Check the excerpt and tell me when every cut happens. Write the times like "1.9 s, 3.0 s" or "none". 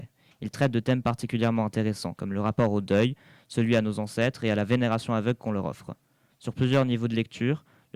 6.3 s